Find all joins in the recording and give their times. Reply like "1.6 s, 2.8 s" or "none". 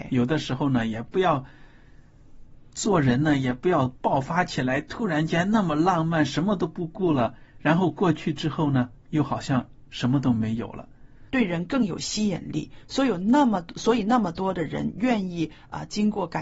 9.0 s, 11.3 s